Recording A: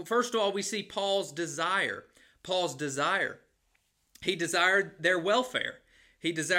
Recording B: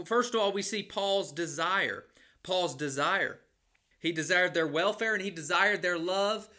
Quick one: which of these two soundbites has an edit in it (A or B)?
B